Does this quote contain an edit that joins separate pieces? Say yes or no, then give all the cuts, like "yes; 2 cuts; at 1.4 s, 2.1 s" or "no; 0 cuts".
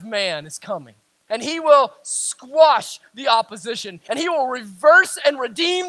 yes; 2 cuts; at 1.3 s, 4.1 s